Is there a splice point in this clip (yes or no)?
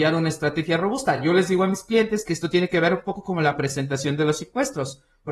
no